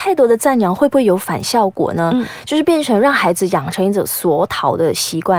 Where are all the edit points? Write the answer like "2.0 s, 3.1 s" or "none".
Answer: none